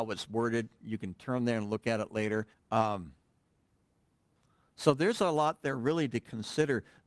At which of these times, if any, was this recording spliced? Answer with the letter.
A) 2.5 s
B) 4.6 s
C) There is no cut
A